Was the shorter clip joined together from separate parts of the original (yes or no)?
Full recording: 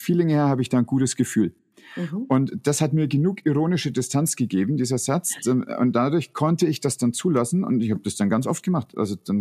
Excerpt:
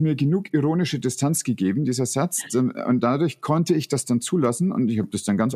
no